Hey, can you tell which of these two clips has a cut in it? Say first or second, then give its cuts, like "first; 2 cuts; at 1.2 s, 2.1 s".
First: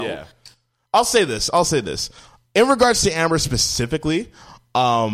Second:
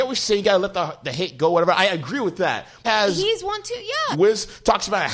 second; 2 cuts; at 2.8 s, 4.1 s